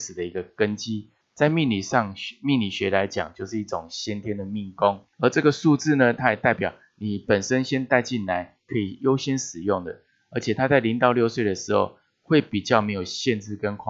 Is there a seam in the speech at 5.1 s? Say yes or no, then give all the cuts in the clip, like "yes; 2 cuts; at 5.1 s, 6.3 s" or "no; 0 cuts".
yes; 2 cuts; at 1.2 s, 5.1 s